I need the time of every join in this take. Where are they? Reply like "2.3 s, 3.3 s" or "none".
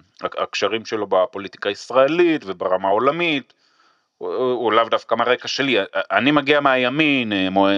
none